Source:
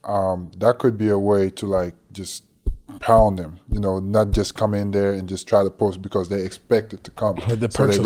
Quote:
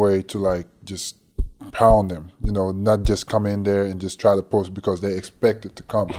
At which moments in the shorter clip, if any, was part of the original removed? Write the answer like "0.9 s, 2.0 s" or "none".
none